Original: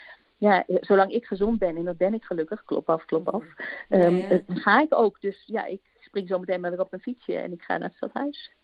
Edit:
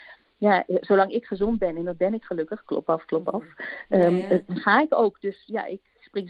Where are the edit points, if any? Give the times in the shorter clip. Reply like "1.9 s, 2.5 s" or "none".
none